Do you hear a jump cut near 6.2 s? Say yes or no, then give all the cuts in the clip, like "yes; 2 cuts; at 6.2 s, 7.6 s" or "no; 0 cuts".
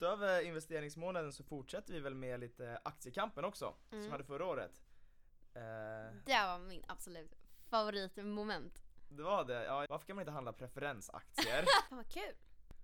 no; 2 cuts; at 9.9 s, 11.9 s